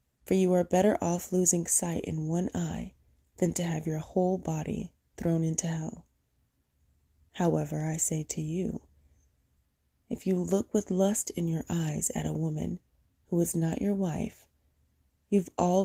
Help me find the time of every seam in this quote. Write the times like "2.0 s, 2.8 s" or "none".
7.3 s

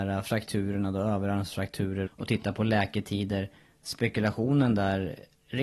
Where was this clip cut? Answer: 2.1 s

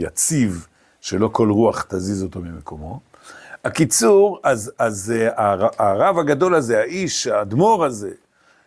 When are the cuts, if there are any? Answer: none

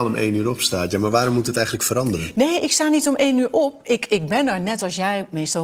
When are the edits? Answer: none

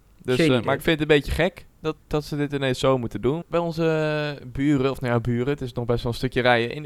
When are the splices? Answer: 2.0 s, 3.4 s

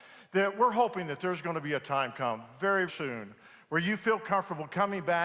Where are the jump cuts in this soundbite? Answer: 2.9 s

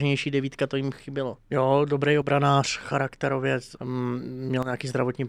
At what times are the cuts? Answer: 1.4 s, 3.8 s

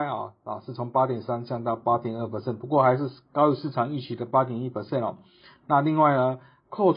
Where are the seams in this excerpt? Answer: none

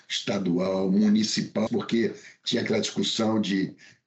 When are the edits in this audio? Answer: 1.7 s

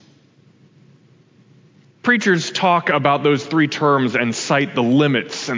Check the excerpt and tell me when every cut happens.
1.8 s

